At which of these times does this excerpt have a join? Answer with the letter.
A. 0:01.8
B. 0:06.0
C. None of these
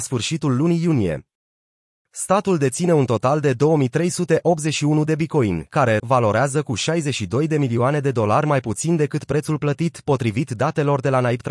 B